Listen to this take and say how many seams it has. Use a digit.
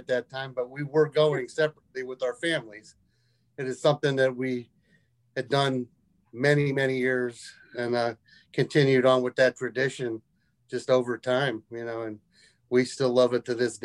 0